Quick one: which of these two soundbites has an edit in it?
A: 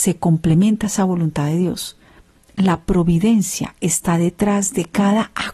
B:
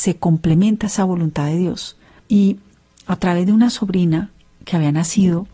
B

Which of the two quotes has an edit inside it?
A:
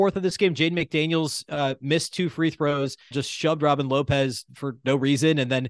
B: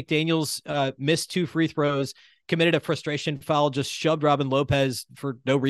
A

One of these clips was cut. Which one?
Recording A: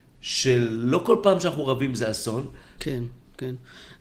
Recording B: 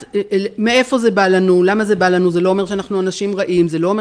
A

